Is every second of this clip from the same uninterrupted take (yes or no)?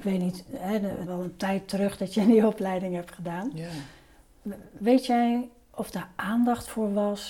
no